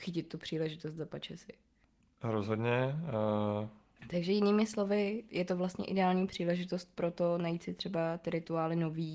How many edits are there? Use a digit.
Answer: 1